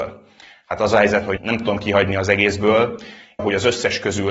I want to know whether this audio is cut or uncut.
cut